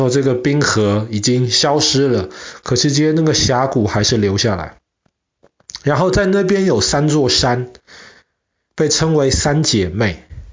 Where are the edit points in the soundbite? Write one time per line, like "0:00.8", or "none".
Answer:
none

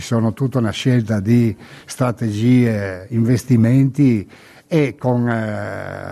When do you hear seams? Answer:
none

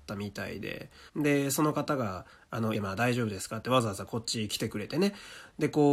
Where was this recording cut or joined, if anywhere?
0:01.1
0:02.7

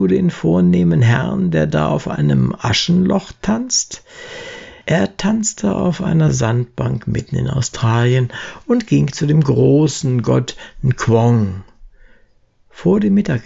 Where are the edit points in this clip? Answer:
0:04.8

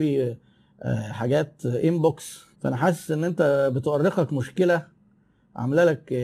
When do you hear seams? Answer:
0:02.5

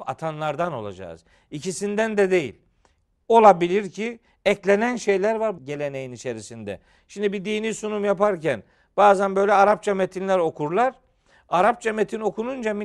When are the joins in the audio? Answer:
0:05.6

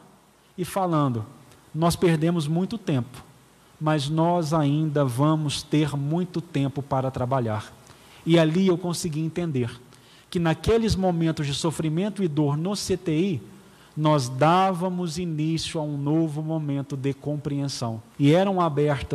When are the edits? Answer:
0:18.1

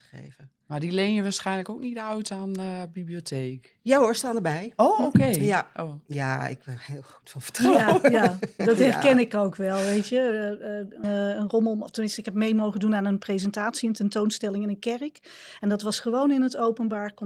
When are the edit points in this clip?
0:11.0

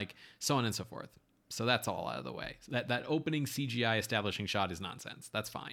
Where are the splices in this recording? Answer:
none

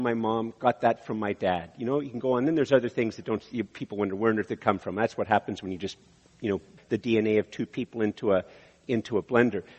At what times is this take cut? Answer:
0:06.8

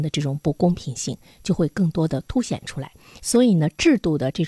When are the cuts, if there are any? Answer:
none

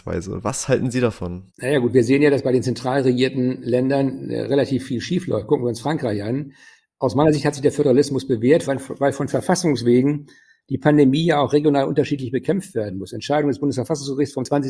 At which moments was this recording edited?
0:01.5
0:08.6

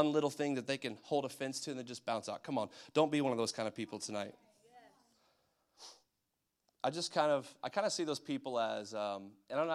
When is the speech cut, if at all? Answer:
none

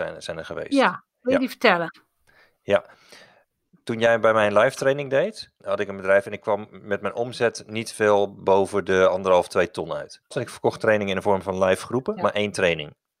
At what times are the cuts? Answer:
0:05.6
0:10.3
0:12.2

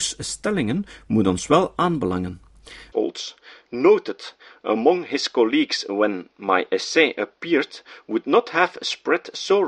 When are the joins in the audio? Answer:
0:02.9

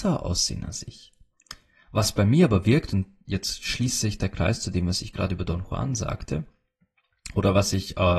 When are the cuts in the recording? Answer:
none

